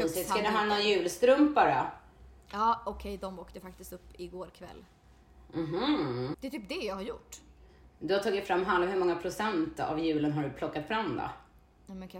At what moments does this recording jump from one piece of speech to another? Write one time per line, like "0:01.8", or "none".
0:06.3